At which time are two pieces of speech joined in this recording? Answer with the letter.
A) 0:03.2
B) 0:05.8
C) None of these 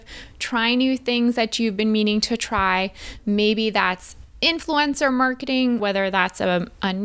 B